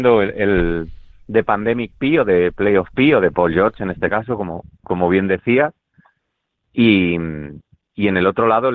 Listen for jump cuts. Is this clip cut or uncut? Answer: cut